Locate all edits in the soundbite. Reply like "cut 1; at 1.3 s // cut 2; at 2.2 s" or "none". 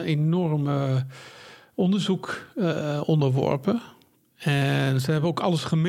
none